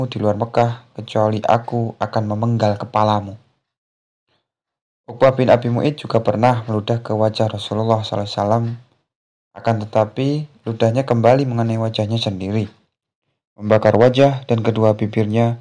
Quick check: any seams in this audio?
no; 0 cuts

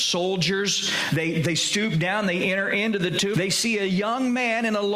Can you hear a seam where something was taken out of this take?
yes; 2 cuts; at 1.1 s, 3.3 s

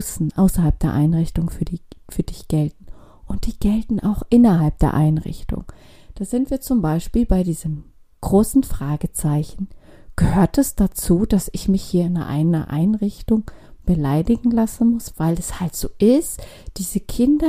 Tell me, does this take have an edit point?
no; 0 cuts

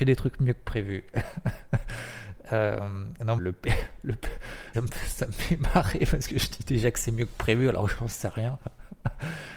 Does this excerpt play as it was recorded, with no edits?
no; 2 cuts; at 3.4 s, 4.7 s

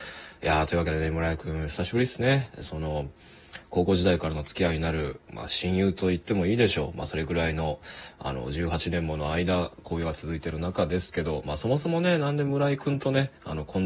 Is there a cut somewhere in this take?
yes; 1 cut; at 5.3 s

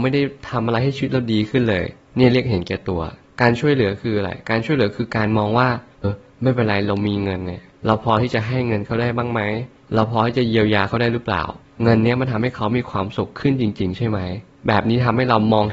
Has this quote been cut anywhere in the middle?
yes; 1 cut; at 6.0 s

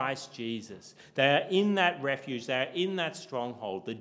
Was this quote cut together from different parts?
no; 0 cuts

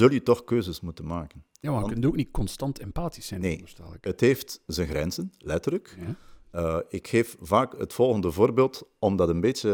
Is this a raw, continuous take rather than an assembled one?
yes; 0 cuts

